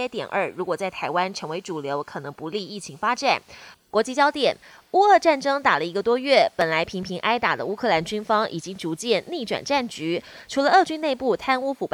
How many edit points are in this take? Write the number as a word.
one